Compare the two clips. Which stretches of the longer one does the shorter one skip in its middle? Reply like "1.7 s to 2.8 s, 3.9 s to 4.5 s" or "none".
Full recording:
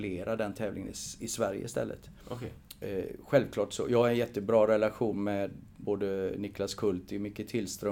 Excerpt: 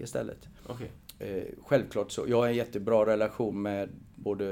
none